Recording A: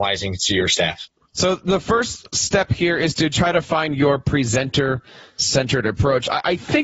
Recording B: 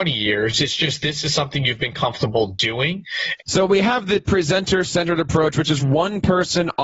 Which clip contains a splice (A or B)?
B